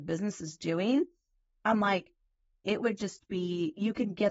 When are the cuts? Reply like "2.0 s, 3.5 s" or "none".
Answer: none